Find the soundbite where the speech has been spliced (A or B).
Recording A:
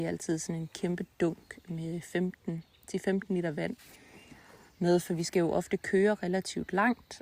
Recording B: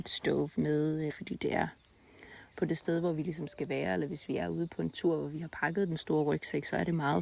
B